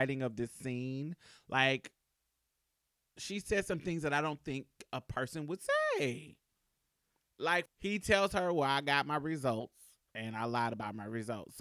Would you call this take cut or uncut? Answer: cut